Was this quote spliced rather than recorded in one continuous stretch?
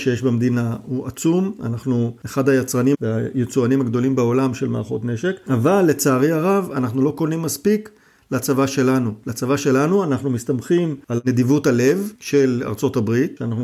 no; 0 cuts

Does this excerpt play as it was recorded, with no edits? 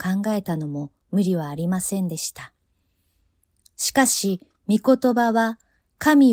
yes; 0 cuts

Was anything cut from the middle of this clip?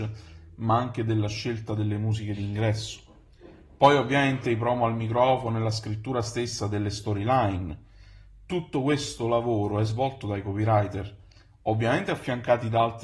no; 0 cuts

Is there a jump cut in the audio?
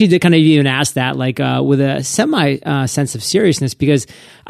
no; 0 cuts

